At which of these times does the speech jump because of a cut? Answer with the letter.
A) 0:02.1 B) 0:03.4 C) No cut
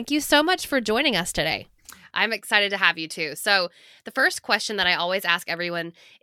A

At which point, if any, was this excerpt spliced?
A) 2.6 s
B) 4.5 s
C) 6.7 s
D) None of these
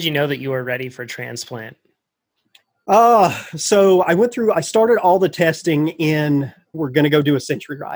C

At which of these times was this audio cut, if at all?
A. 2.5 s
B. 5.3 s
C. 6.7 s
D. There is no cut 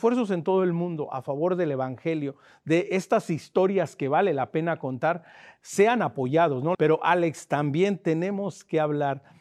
C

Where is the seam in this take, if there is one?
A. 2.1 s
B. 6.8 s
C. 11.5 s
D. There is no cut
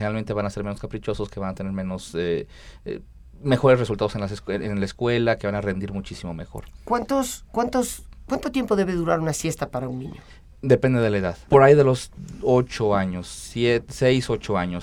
C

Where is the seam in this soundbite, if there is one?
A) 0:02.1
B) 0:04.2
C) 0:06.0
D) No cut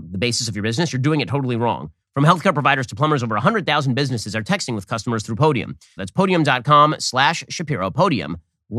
C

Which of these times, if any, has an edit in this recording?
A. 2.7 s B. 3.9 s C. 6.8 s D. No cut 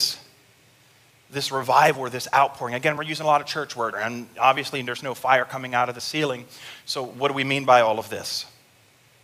B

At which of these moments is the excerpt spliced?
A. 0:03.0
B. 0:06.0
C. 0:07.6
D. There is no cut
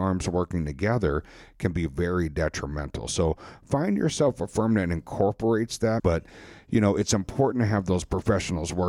B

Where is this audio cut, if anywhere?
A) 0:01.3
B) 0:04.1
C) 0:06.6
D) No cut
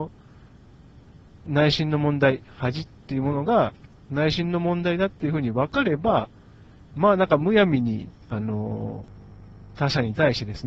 D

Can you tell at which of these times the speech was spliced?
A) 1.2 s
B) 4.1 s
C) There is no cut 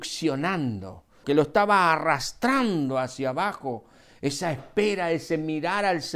A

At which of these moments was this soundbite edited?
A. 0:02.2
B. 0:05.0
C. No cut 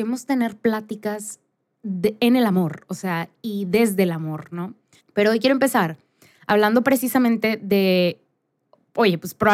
B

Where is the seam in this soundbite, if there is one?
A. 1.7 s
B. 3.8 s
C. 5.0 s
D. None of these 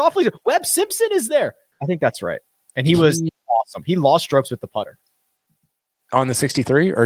A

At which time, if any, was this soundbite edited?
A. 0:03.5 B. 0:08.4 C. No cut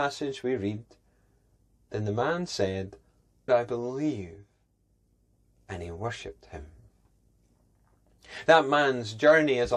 A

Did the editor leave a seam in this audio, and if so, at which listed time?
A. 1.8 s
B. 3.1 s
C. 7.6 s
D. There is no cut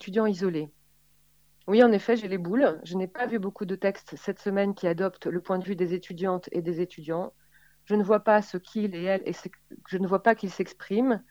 D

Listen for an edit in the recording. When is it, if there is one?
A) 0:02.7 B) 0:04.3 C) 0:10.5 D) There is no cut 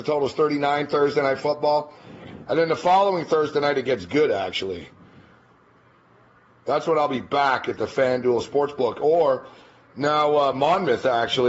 D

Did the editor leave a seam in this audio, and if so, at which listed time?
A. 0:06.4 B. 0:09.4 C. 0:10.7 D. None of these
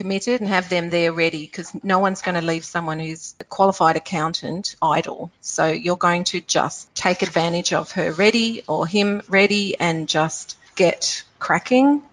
C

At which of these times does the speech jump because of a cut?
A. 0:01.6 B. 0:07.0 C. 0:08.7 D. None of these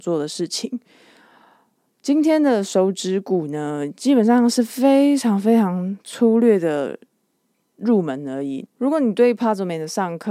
C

